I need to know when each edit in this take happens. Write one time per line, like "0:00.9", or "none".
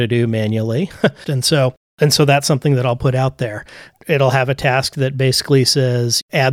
0:01.2

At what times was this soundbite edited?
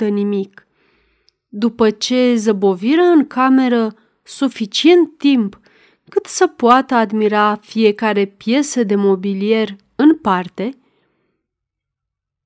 none

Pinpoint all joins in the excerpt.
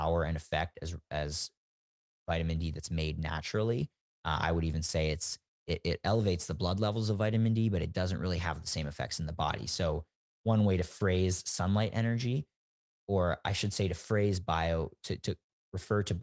none

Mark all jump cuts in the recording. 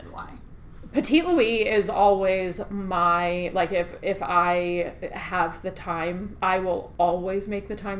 none

